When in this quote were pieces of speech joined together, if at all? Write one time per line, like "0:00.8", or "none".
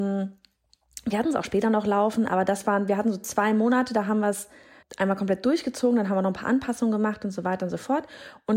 0:04.8